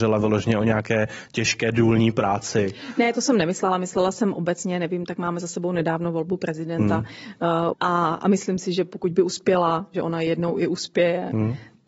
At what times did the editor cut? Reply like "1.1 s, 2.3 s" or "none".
7.7 s, 9.9 s